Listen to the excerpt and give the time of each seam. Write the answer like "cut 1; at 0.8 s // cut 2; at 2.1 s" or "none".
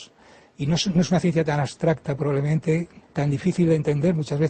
cut 1; at 3.0 s